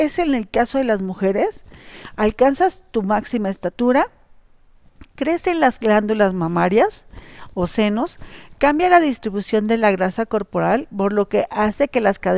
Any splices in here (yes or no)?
no